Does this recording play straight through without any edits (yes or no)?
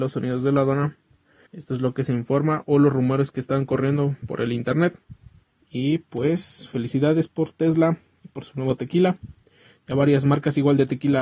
no